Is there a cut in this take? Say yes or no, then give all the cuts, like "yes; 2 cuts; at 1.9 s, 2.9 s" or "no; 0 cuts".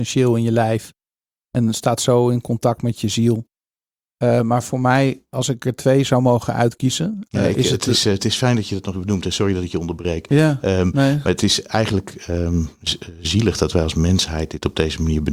yes; 1 cut; at 8.9 s